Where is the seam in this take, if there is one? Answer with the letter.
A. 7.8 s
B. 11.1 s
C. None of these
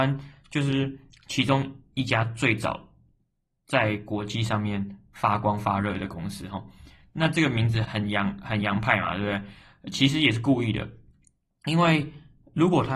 A